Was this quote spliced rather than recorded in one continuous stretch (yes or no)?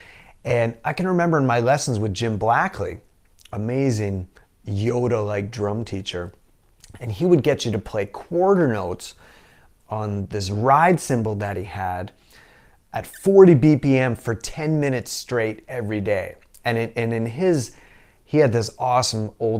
yes